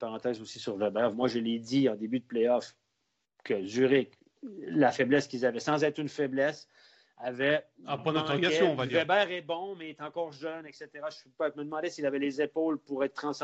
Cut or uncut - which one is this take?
cut